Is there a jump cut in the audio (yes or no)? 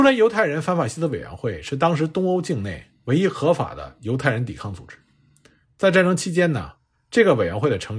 no